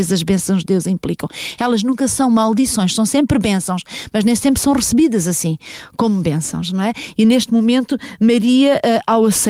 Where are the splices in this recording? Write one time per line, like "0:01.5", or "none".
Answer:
none